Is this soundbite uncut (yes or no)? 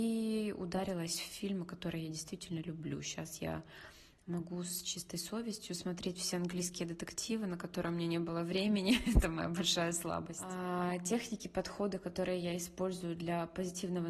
yes